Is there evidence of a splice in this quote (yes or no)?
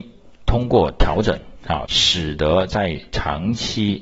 yes